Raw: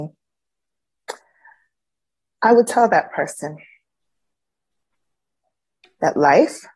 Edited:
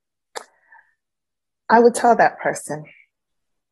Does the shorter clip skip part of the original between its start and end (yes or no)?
no